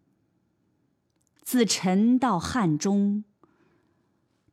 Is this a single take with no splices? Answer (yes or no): yes